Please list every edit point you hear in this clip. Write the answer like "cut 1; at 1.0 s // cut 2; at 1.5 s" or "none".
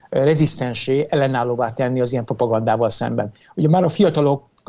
cut 1; at 3.4 s